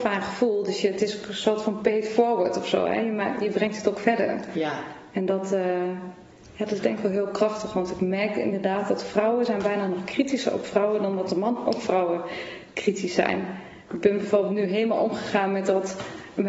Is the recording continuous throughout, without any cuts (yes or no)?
yes